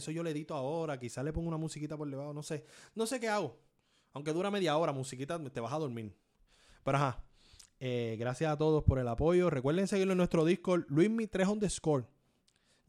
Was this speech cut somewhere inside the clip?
no; 0 cuts

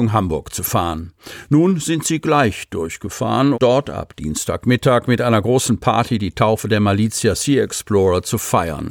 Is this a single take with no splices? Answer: no; 1 cut; at 3.5 s

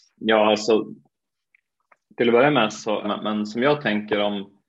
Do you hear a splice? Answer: yes; 1 cut; at 3.0 s

